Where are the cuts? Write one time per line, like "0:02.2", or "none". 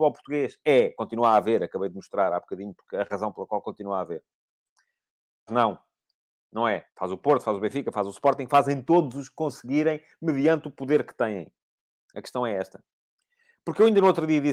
0:05.5
0:06.9